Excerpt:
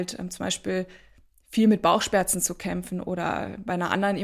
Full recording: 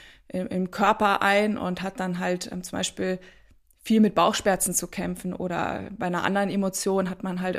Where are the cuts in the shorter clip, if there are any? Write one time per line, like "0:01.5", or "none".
none

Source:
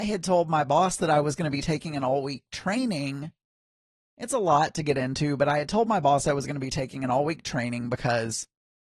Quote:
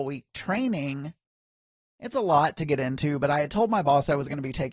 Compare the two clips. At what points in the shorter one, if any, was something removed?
none

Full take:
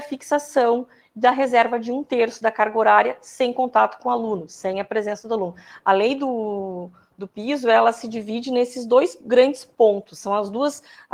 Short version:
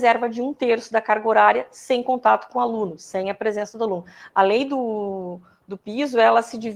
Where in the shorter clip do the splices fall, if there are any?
none

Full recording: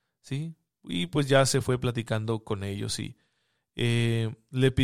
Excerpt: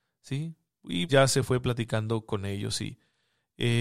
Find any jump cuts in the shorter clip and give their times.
0:01.1

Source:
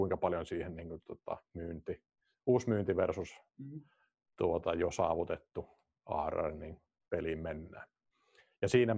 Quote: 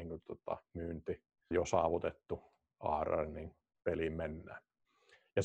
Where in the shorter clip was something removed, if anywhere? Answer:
0:01.5

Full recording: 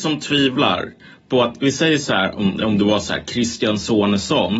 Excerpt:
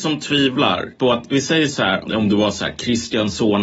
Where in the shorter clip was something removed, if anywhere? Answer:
0:00.9
0:02.0

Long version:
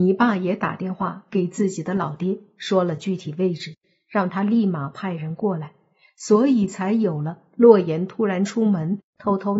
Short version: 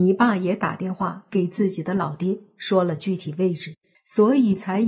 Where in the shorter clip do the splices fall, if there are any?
0:03.9

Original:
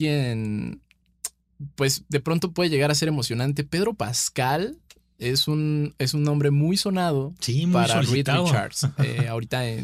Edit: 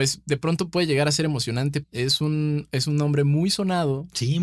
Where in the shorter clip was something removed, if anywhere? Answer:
0:01.8

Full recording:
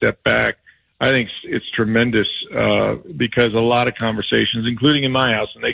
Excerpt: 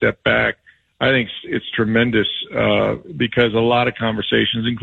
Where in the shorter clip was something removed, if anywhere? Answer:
none

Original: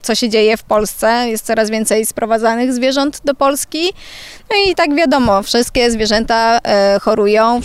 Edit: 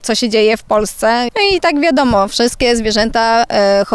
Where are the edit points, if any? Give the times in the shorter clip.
0:01.3

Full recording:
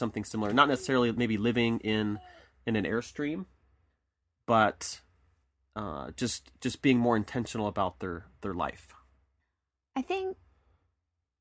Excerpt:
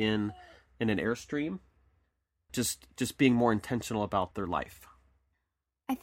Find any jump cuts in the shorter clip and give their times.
0:02.5
0:04.3

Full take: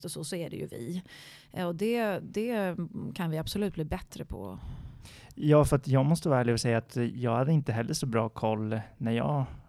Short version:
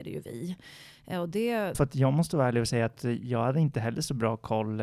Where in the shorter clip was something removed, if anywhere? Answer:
0:01.7

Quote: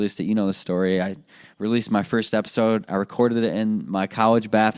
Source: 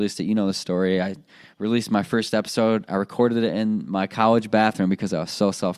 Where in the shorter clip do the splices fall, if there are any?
none

